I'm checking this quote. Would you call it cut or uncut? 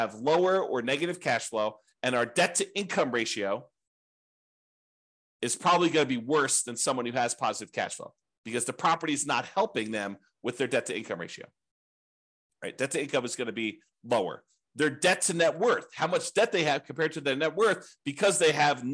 uncut